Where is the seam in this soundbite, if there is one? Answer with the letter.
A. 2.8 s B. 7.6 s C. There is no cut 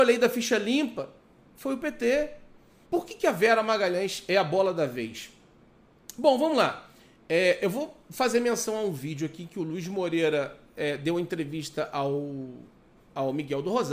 A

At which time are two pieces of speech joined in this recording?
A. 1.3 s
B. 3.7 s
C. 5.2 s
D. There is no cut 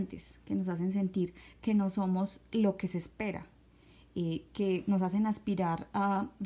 D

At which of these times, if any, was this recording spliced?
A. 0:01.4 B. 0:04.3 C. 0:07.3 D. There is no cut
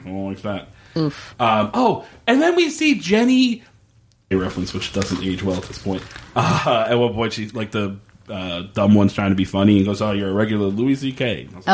B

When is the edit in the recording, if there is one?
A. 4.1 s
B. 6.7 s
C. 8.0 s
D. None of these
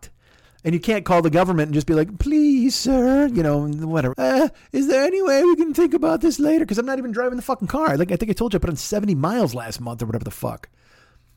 A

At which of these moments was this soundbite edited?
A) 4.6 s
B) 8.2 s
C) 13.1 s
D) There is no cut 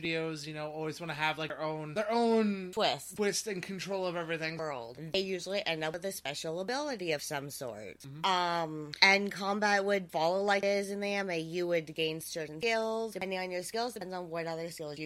A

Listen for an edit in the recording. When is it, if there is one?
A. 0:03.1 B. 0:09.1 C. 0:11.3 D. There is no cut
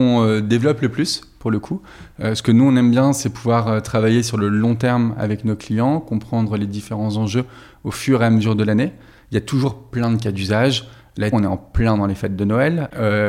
C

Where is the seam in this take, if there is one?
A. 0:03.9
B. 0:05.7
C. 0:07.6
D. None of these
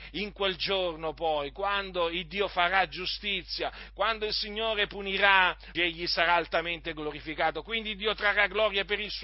B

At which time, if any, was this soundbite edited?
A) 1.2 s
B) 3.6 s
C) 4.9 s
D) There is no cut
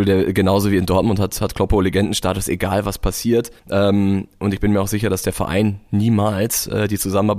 B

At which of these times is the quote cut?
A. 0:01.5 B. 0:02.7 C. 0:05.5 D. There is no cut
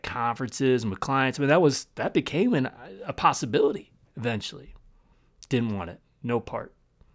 D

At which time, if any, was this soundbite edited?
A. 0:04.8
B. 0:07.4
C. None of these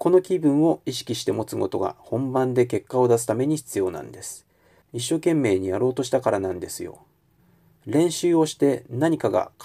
A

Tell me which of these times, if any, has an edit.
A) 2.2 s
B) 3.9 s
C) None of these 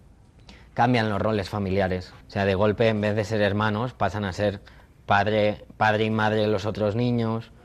A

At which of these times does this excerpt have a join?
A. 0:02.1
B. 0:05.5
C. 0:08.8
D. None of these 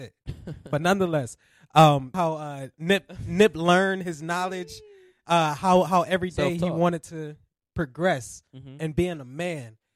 A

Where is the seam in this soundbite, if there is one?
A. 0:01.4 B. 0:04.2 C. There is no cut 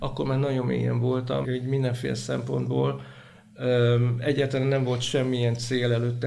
A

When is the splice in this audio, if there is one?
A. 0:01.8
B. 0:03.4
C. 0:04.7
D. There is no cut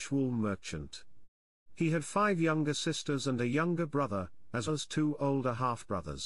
C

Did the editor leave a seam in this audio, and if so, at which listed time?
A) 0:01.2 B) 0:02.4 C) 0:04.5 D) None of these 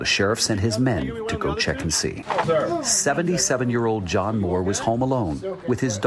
B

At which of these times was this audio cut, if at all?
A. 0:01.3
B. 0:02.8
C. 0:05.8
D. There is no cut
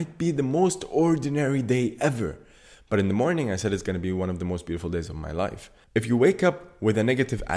C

